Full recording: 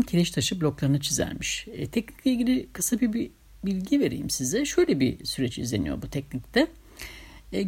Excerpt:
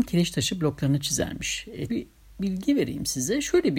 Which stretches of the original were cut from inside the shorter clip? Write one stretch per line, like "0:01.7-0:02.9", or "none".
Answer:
0:01.9-0:03.1